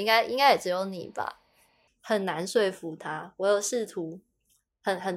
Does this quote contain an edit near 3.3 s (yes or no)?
no